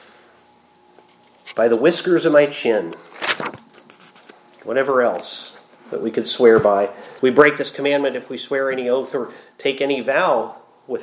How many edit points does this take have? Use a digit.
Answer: 1